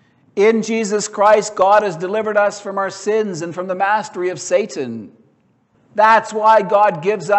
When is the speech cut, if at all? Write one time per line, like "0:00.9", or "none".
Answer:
0:05.7